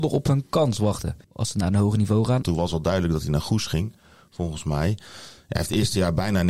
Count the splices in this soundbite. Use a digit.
2